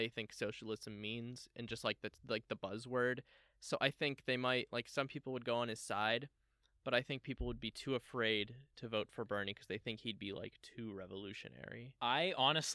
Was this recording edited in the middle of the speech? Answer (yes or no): no